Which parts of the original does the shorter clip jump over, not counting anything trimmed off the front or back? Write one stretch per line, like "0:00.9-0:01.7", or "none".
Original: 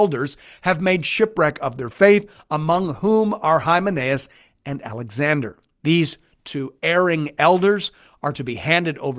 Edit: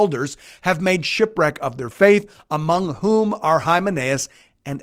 none